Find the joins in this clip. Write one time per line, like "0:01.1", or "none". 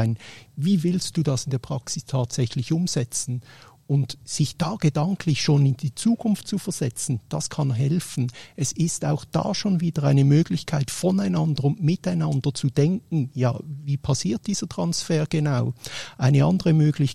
none